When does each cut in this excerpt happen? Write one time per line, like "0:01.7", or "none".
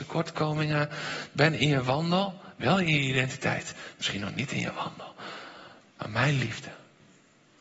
none